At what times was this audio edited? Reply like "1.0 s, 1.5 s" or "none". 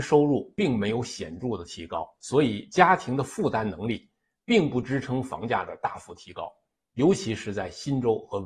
none

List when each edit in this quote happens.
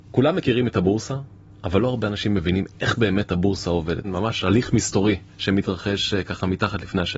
4.0 s

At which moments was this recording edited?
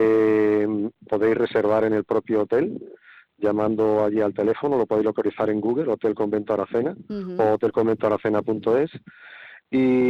none

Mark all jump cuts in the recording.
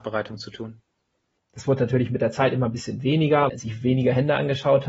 1.4 s, 3.5 s

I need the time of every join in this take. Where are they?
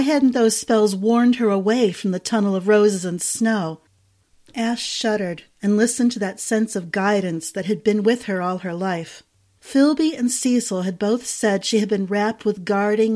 4.3 s

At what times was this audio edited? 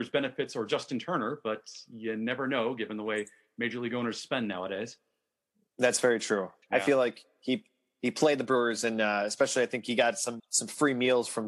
6.6 s, 10.4 s

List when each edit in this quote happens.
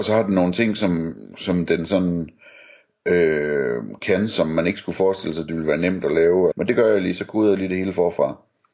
6.5 s

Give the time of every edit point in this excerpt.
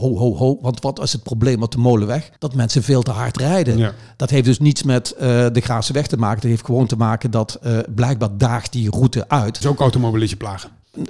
2.4 s, 9.6 s

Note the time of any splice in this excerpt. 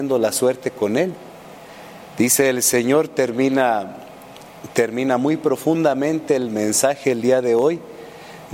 none

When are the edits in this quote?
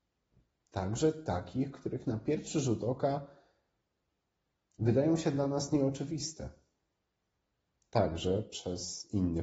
none

